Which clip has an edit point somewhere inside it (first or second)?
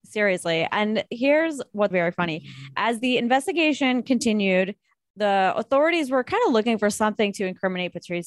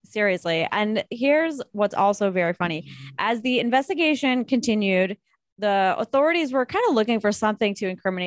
first